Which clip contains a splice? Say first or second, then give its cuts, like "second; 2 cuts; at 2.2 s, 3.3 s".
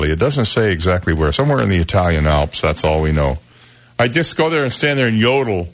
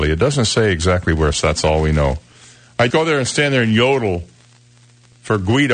second; 2 cuts; at 1.3 s, 2.9 s